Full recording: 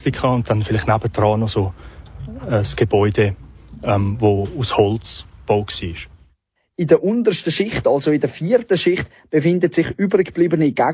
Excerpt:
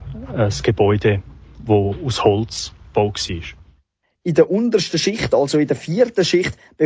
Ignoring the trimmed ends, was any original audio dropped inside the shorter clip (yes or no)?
yes